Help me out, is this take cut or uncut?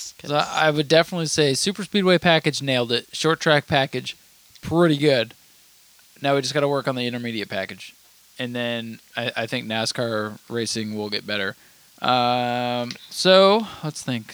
uncut